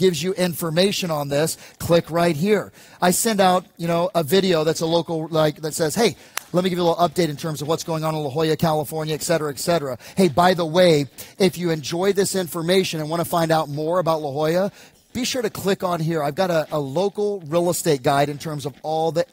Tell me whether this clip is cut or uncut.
cut